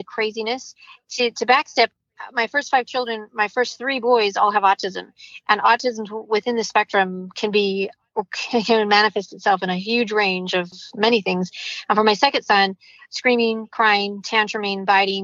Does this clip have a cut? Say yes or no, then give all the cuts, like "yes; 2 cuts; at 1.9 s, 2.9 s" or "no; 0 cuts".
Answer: no; 0 cuts